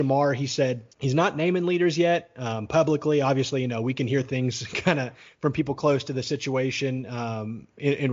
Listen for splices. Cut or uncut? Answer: cut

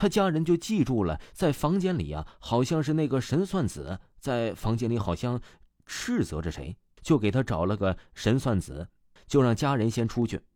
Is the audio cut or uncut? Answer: cut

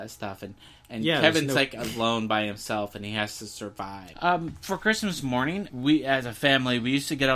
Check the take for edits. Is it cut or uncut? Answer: cut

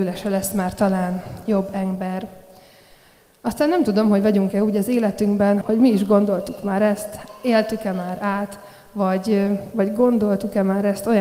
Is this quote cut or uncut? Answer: cut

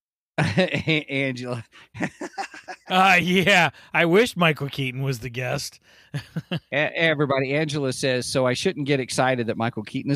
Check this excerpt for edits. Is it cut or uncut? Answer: uncut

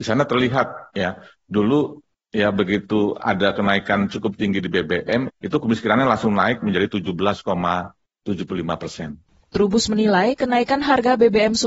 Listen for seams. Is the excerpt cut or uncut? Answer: cut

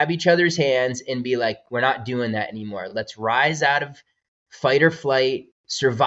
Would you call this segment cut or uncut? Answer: uncut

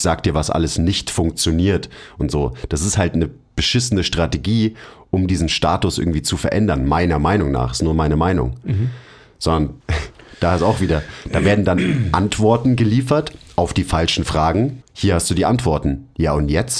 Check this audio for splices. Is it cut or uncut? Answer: cut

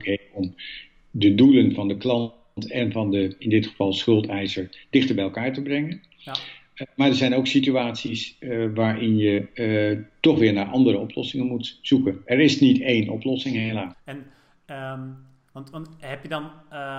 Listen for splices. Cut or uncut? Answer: cut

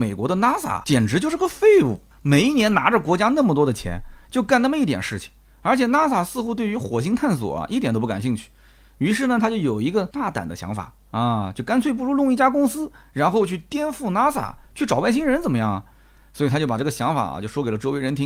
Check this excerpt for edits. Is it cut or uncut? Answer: uncut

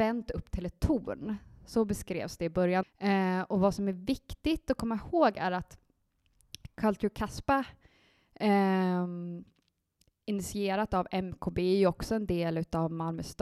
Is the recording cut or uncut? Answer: cut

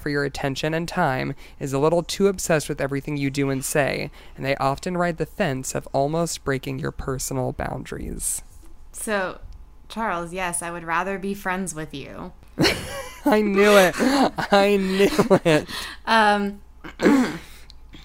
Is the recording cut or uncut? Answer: uncut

